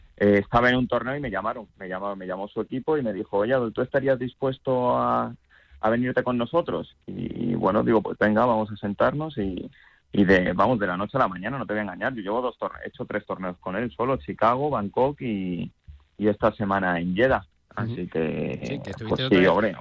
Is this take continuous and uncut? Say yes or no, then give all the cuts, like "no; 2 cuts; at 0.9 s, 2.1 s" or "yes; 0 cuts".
yes; 0 cuts